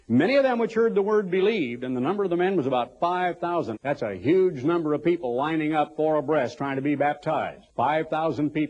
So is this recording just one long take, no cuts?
no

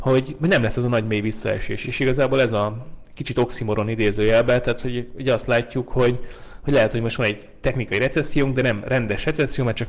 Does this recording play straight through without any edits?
yes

